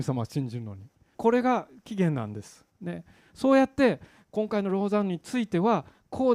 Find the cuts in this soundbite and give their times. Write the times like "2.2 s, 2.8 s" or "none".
1.1 s, 2.8 s